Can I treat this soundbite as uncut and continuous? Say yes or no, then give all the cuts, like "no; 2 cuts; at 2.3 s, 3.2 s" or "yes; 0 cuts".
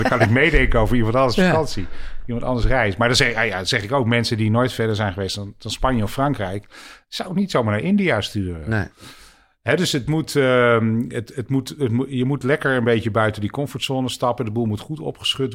yes; 0 cuts